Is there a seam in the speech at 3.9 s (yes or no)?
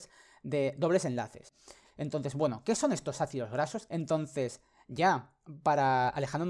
yes